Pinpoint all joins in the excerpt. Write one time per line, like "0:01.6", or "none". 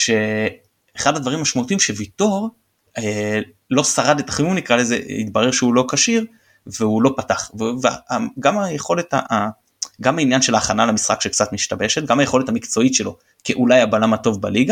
0:09.3